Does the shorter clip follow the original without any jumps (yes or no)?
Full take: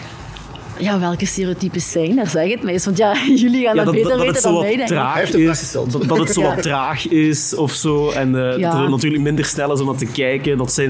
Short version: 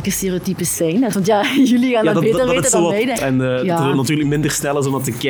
no